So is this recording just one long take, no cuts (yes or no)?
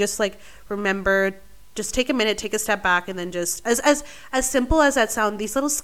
yes